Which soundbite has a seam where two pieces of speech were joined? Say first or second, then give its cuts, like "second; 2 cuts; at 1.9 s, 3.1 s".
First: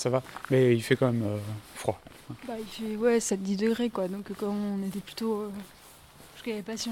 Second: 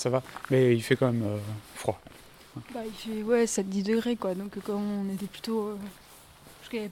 first; 1 cut; at 2.2 s